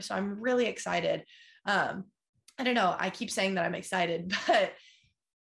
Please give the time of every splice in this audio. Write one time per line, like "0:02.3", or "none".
none